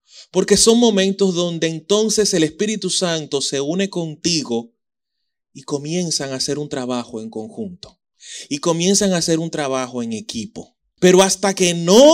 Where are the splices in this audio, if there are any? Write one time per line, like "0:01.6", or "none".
0:11.0